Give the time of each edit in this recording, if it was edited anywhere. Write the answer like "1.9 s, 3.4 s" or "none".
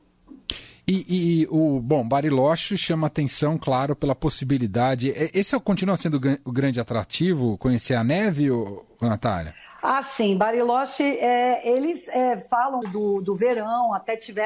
12.8 s